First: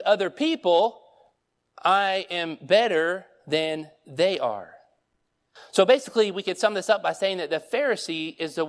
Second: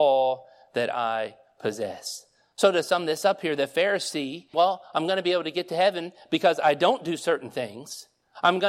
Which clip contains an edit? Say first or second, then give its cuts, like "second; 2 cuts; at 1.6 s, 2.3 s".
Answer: second; 1 cut; at 4.5 s